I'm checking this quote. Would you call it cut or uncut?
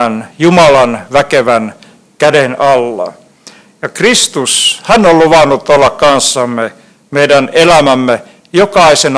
uncut